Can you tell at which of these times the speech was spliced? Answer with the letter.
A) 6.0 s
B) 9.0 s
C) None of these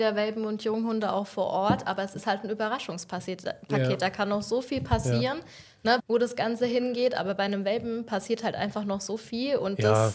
A